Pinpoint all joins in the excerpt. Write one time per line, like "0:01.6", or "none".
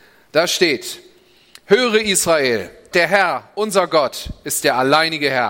0:02.9